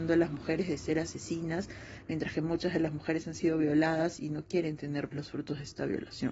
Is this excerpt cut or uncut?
cut